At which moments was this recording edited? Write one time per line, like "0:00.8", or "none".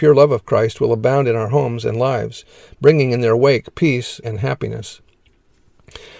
0:04.2